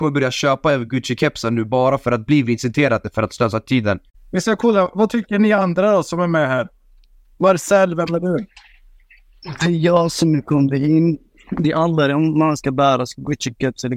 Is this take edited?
no; 0 cuts

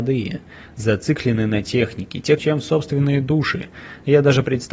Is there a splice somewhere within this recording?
yes; 1 cut; at 2.4 s

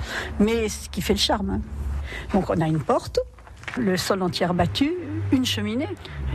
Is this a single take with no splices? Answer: no; 1 cut; at 3.8 s

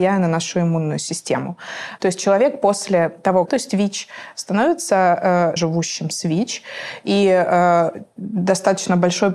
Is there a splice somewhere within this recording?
yes; 3 cuts; at 2.0 s, 3.5 s, 5.6 s

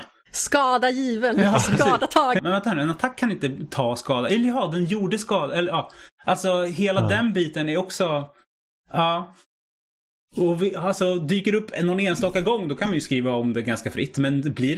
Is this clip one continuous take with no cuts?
no; 1 cut; at 2.4 s

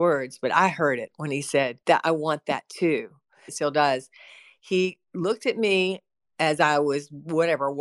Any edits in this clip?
yes; 2 cuts; at 1.8 s, 3.5 s

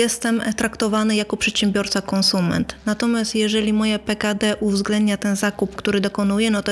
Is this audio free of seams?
no; 1 cut; at 5.8 s

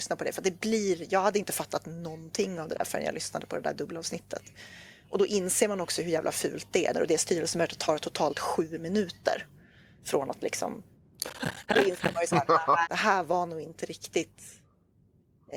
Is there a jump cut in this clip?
yes; 2 cuts; at 6.9 s, 12.9 s

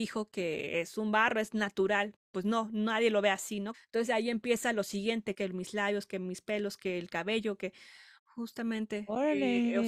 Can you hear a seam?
yes; 3 cuts; at 3.7 s, 5.3 s, 8.2 s

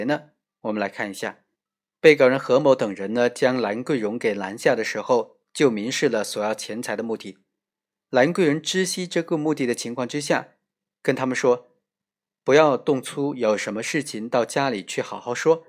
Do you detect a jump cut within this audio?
no; 0 cuts

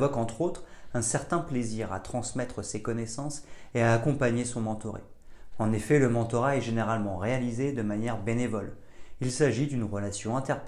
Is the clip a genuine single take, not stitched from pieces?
no; 2 cuts; at 5.5 s, 9.2 s

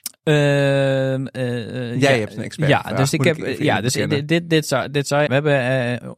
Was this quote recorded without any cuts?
no; 1 cut; at 5.3 s

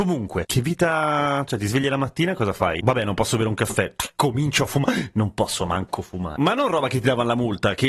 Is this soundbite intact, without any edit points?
yes; 0 cuts

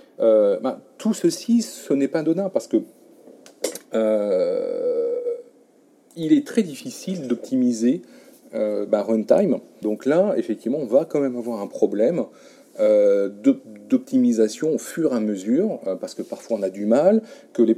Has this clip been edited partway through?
yes; 1 cut; at 9.8 s

